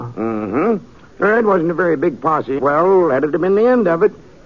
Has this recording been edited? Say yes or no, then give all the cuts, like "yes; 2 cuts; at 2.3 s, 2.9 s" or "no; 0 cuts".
yes; 1 cut; at 2.6 s